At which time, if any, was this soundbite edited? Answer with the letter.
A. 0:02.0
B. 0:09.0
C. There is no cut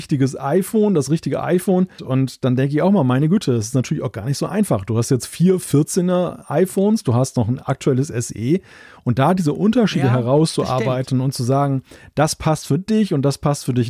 A